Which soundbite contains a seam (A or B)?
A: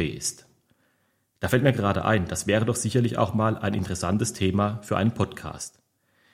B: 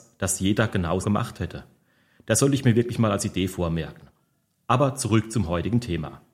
B